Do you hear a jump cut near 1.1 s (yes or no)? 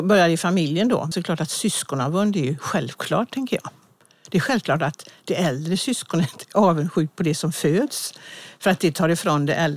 yes